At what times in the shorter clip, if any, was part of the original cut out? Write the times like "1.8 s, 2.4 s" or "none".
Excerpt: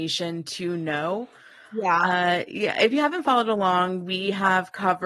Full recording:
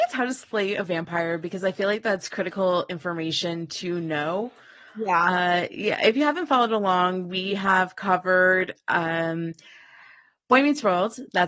none